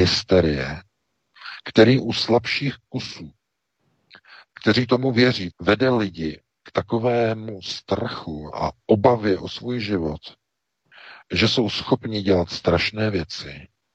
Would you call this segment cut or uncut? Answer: cut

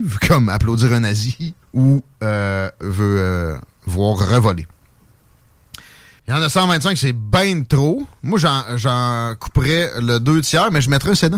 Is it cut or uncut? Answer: cut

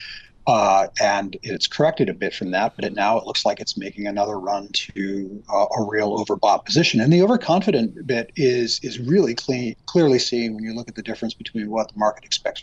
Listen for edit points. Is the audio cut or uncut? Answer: uncut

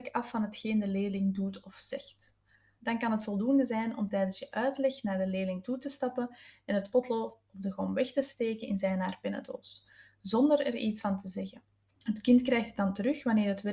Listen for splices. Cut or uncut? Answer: cut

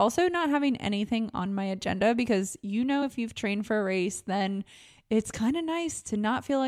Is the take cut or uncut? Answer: uncut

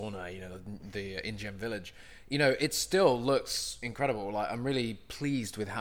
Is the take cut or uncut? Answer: uncut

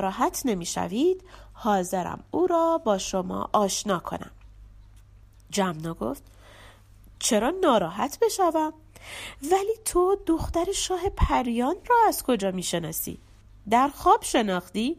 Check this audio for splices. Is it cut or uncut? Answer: uncut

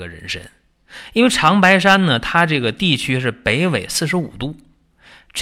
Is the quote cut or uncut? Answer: uncut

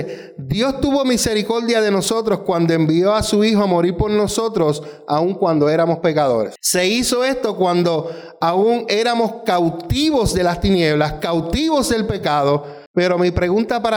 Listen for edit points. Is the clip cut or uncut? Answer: cut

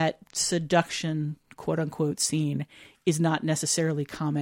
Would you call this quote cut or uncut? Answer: uncut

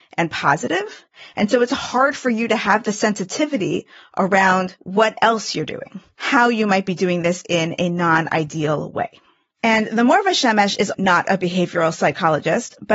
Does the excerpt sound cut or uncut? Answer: cut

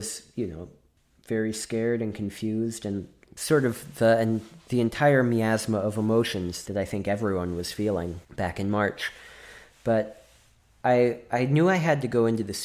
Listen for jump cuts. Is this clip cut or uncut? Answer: cut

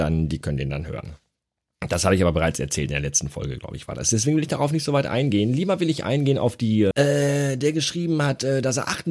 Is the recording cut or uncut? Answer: cut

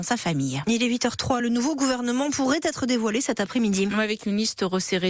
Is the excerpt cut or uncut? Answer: uncut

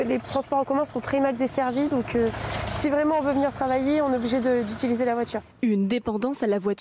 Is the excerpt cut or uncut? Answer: uncut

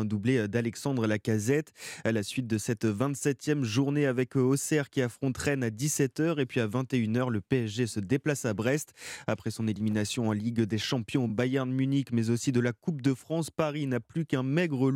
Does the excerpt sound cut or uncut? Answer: uncut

